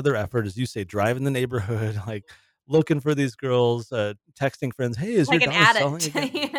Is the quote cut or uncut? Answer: uncut